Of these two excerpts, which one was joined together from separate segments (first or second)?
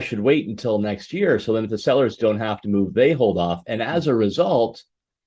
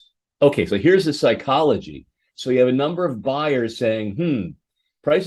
second